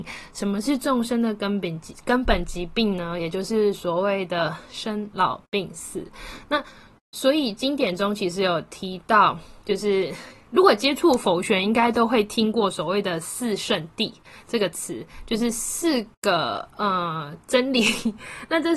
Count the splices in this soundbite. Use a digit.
0